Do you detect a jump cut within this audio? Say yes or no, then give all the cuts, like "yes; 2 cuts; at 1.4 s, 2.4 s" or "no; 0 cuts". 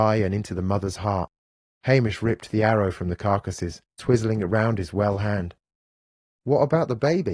yes; 1 cut; at 6.4 s